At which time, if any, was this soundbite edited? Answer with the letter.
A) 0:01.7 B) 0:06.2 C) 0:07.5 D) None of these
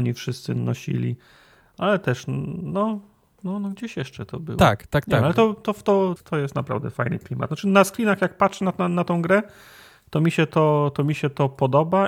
B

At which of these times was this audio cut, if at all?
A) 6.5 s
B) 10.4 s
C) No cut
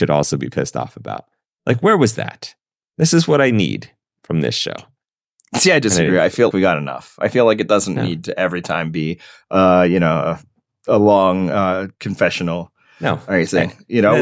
A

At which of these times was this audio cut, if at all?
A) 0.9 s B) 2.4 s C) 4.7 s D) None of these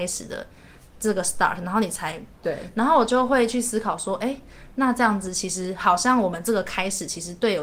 B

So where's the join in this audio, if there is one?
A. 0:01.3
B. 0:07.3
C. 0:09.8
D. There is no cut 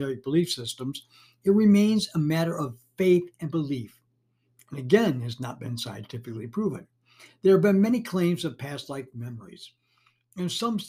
D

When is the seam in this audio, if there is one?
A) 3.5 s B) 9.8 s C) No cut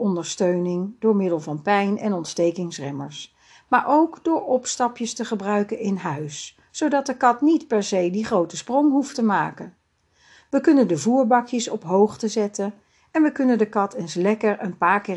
C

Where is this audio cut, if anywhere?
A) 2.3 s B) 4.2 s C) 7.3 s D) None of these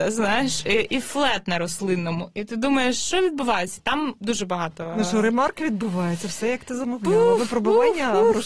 B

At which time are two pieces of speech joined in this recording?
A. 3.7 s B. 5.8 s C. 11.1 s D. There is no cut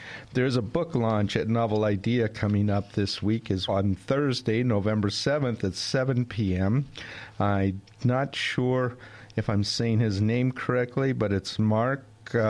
A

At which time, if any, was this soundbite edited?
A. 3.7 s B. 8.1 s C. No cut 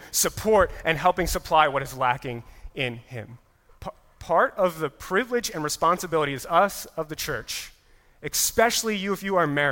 A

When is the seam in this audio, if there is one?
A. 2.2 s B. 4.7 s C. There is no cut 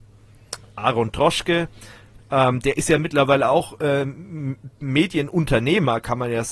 A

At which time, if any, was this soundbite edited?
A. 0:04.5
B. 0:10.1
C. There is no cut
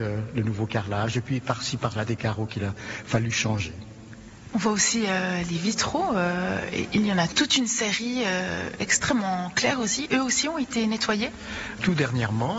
C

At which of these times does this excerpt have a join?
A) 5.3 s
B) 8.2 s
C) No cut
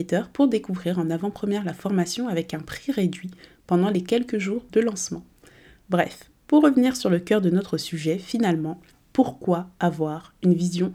C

